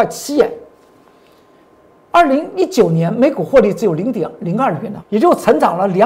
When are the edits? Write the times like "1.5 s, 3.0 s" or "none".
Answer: 5.0 s